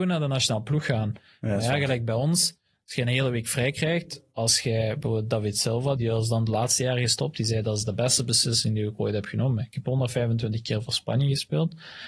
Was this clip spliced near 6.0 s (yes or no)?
yes